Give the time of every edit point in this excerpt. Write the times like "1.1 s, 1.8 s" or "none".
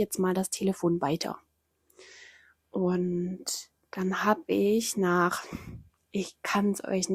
none